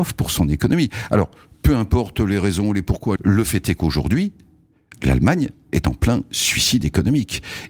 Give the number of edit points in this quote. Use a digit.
1